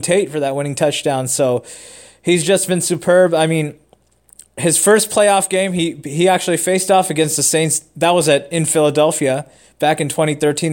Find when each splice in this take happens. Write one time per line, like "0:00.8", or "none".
none